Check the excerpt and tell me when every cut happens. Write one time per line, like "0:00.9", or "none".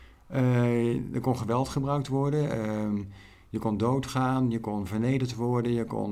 none